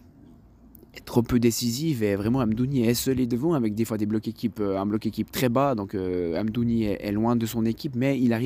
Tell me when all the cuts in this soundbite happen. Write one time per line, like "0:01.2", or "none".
none

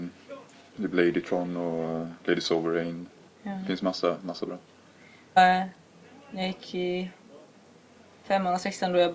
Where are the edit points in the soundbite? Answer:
0:03.3
0:05.4

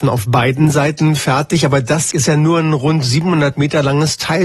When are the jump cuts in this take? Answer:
0:02.1

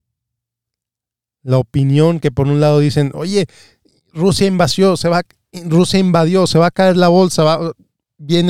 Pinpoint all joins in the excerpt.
none

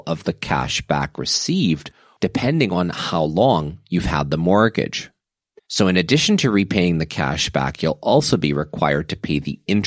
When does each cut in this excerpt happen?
0:02.2
0:05.6

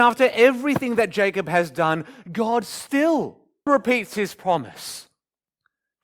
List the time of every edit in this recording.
0:03.7

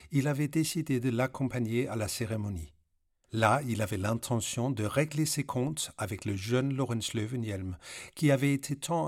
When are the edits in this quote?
0:03.2

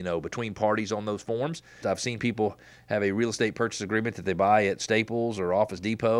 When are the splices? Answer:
0:01.8

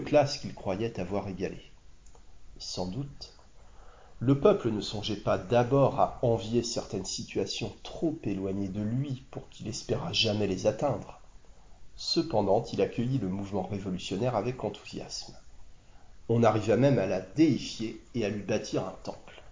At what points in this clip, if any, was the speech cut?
0:16.2

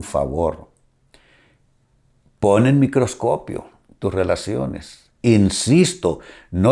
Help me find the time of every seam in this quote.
none

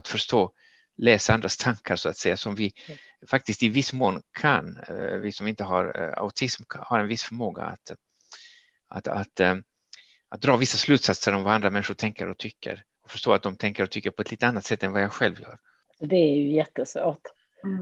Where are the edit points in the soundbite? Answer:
none

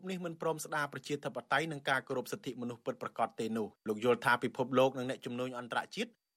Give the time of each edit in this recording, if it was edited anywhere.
0:03.8

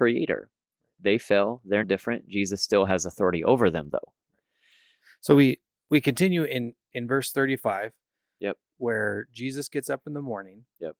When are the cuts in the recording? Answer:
0:01.8

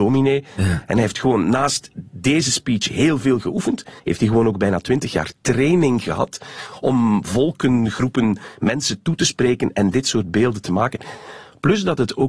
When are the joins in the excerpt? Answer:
0:04.0

